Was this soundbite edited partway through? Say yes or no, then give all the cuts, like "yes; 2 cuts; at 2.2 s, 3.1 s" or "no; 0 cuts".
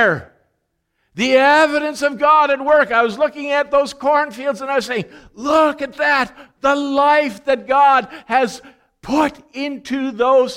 no; 0 cuts